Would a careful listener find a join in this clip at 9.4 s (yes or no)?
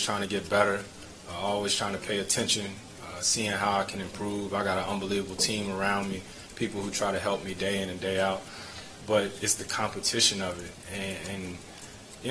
yes